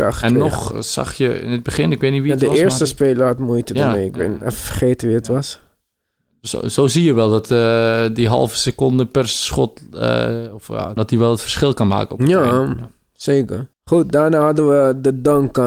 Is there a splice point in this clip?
yes; 2 cuts; at 11.0 s, 13.7 s

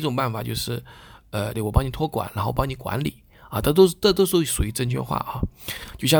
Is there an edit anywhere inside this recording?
yes; 1 cut; at 1.5 s

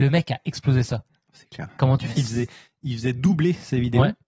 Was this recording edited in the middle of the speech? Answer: yes; 1 cut; at 2.1 s

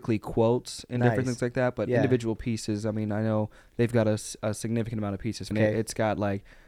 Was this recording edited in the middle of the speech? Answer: yes; 1 cut; at 5.5 s

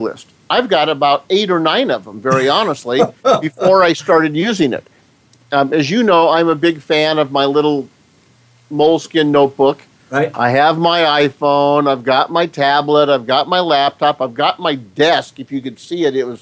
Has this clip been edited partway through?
no; 0 cuts

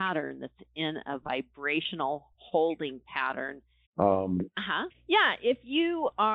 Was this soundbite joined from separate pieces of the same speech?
yes; 2 cuts; at 3.8 s, 4.9 s

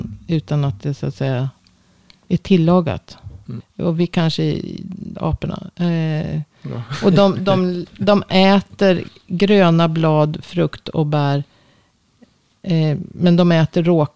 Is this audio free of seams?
no; 2 cuts; at 3.6 s, 5.1 s

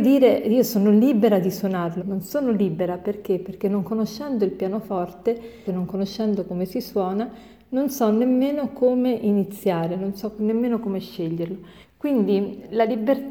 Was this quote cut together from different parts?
yes; 3 cuts; at 2.0 s, 5.7 s, 11.8 s

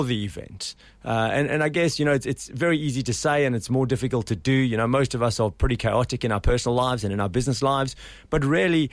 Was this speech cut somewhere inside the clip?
no; 0 cuts

